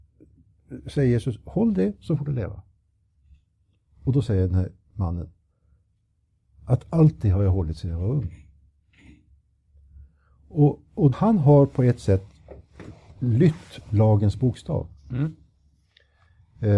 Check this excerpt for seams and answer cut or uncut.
cut